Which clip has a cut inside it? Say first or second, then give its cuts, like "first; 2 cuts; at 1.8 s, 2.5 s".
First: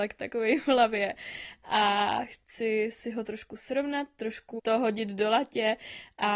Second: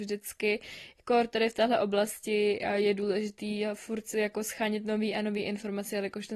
first; 1 cut; at 4.6 s